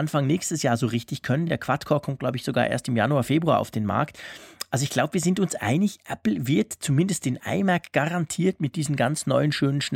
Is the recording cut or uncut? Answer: uncut